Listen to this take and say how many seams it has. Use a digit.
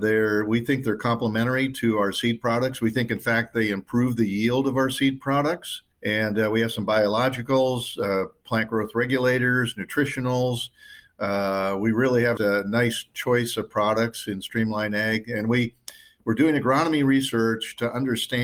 2